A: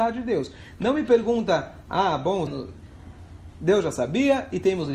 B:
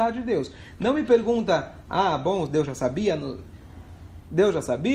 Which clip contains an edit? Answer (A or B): A